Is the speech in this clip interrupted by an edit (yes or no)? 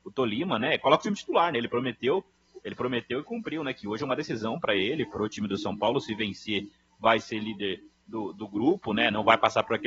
no